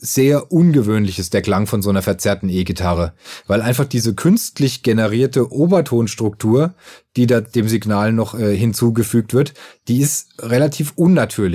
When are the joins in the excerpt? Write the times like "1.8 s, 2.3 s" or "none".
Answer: none